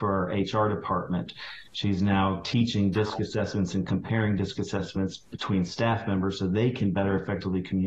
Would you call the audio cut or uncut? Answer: uncut